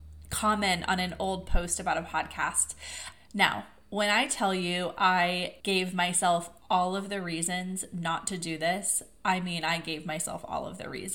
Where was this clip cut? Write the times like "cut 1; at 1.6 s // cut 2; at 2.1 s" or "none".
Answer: cut 1; at 3.1 s // cut 2; at 5.6 s